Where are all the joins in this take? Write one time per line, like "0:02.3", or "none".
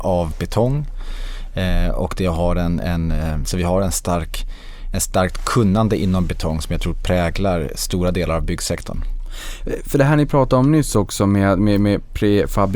none